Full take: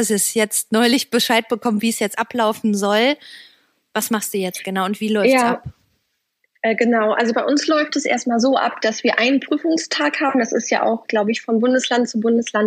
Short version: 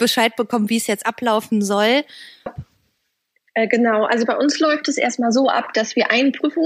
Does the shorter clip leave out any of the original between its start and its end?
yes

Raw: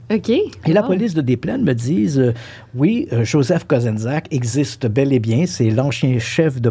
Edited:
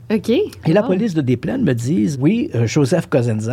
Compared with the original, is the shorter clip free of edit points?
no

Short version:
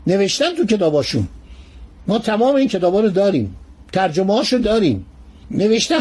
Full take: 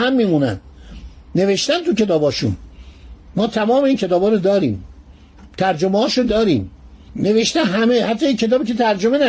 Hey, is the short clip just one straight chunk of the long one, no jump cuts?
no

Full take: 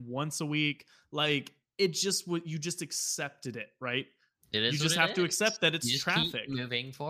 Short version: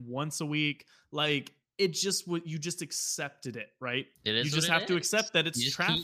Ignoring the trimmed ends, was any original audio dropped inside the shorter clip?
yes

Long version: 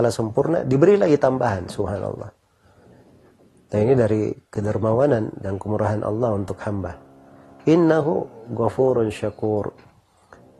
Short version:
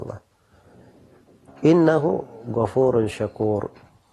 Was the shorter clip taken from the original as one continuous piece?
no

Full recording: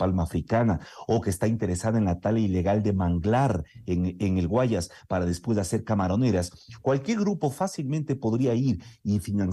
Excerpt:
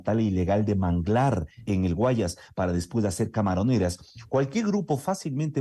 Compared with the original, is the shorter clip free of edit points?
no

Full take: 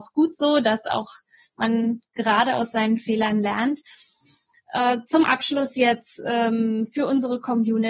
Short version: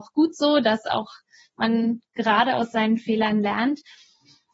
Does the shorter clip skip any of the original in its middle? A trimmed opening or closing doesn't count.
no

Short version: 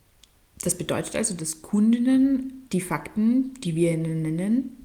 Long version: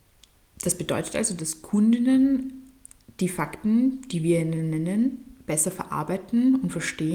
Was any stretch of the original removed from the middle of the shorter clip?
yes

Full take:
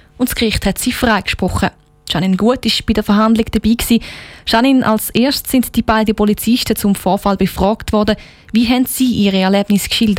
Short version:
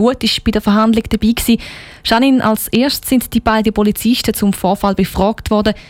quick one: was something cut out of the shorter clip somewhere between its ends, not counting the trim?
no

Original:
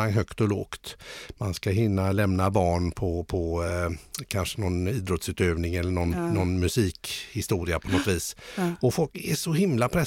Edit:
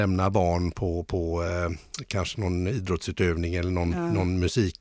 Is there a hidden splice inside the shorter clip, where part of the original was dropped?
no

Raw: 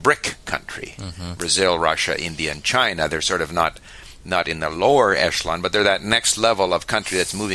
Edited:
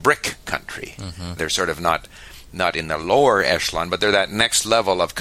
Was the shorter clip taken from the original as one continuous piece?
no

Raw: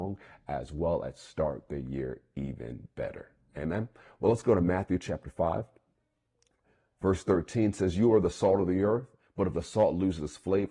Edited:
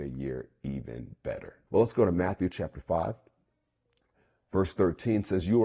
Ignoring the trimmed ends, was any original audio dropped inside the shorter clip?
yes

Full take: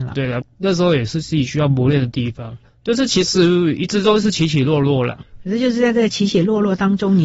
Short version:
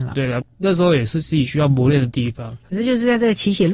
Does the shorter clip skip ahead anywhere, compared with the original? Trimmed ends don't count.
yes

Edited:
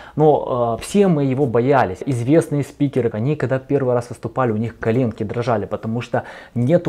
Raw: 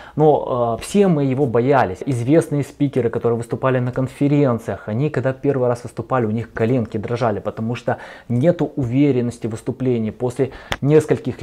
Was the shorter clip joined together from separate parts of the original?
yes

